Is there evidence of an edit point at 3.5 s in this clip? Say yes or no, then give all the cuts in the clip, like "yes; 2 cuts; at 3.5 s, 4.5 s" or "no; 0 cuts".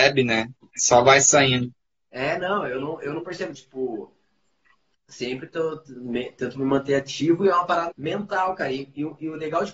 yes; 2 cuts; at 3.5 s, 7.9 s